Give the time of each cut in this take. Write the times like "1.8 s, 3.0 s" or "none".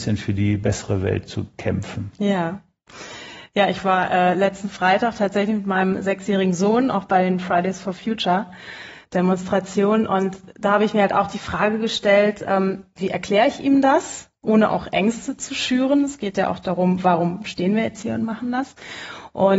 none